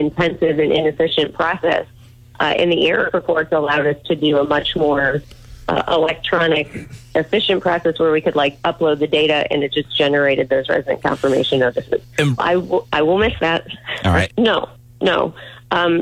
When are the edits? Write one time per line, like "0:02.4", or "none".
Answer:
0:12.4
0:14.3